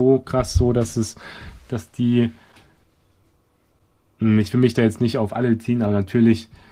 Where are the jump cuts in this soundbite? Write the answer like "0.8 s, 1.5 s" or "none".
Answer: none